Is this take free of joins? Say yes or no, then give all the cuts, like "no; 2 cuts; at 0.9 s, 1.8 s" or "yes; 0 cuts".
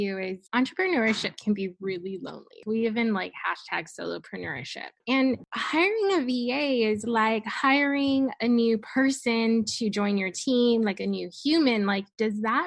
no; 1 cut; at 5.0 s